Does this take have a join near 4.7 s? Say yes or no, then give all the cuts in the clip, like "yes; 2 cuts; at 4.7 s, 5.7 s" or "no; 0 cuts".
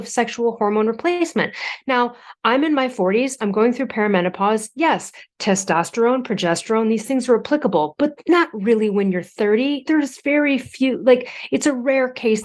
no; 0 cuts